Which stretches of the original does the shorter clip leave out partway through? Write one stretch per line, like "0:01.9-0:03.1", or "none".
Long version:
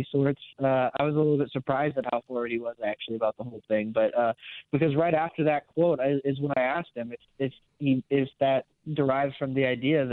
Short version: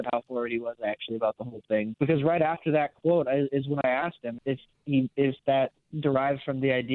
0:03.9-0:04.7
0:07.1-0:07.3